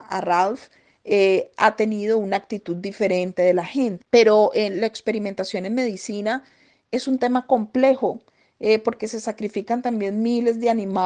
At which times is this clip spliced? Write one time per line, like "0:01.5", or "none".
0:04.0